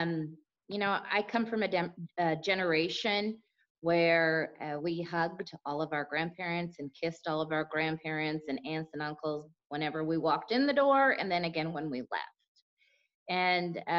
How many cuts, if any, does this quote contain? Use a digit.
0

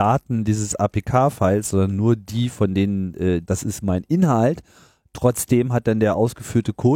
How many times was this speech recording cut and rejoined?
1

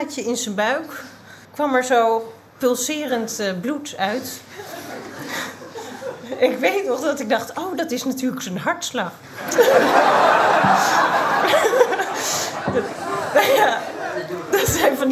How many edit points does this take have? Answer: 1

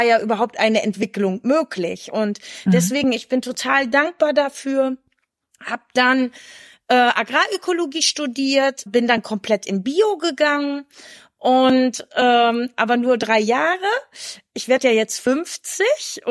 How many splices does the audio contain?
1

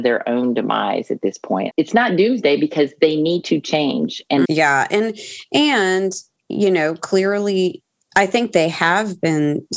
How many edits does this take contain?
2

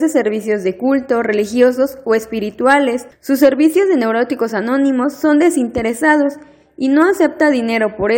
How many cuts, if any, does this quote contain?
1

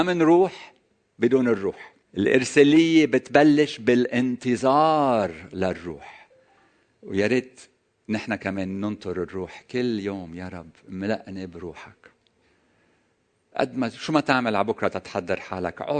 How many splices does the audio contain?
1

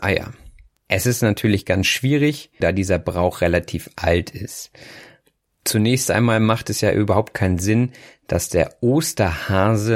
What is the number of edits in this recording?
1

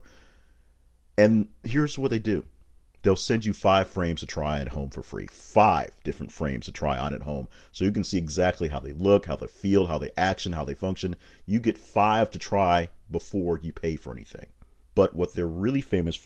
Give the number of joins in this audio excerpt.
1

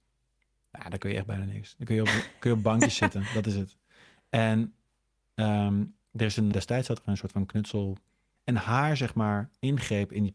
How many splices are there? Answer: 2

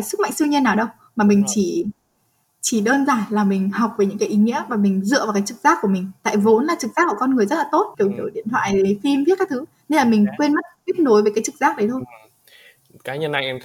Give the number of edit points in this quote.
1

